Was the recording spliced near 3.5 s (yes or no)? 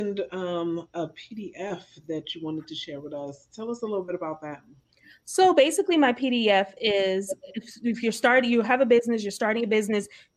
no